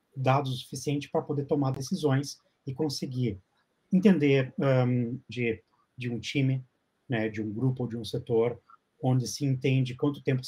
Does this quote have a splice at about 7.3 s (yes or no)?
no